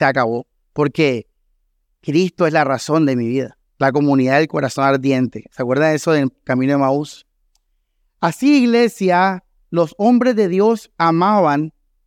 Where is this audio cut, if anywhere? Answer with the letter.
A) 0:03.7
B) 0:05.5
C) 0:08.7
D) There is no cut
A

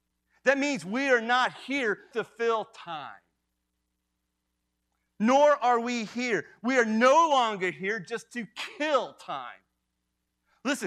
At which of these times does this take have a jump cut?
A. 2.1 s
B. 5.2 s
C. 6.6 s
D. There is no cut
A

